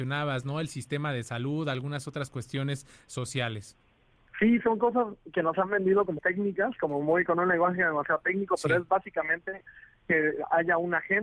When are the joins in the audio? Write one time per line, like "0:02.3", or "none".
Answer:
0:06.2